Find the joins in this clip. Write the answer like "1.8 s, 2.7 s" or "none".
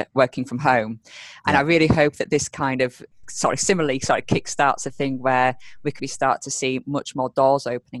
3.2 s, 6.0 s